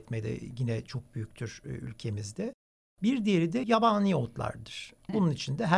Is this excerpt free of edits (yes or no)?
yes